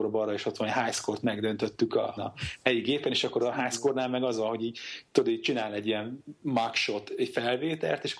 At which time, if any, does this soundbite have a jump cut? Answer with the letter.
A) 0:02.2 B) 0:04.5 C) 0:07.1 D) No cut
A